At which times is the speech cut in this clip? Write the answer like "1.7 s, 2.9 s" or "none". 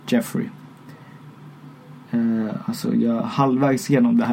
none